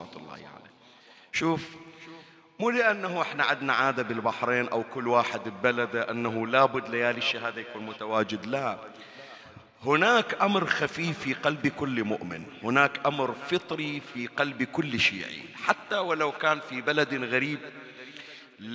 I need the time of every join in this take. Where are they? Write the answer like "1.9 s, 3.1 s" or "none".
none